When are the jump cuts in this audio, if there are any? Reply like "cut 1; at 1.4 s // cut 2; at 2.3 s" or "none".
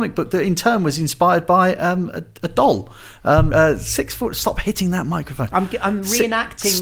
cut 1; at 3.5 s

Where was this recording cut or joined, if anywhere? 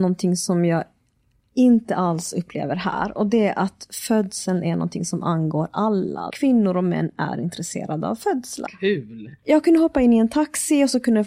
cut 1; at 6.3 s // cut 2; at 8.7 s

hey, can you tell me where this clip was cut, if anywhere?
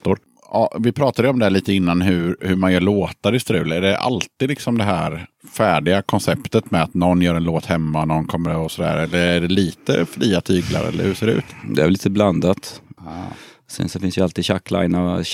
cut 1; at 2.4 s // cut 2; at 13.0 s

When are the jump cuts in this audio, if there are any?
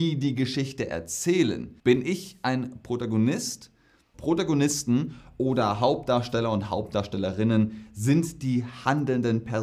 cut 1; at 1.8 s // cut 2; at 4.1 s

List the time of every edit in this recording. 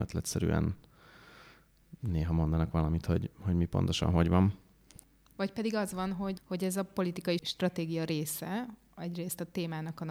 none

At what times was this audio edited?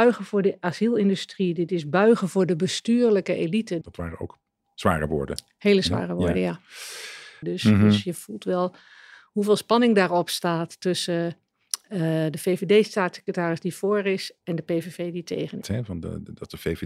cut 1; at 3.8 s // cut 2; at 7.4 s // cut 3; at 15.6 s

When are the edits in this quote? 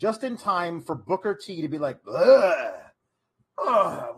none

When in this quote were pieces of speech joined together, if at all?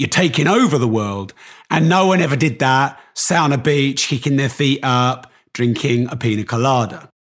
none

